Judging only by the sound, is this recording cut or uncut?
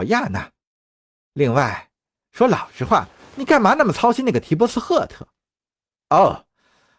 uncut